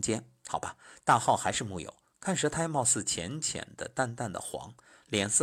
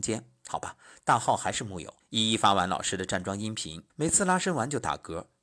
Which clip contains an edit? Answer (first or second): second